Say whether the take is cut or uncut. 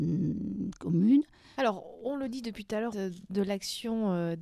cut